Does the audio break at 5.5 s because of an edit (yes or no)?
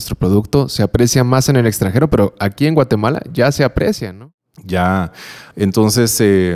yes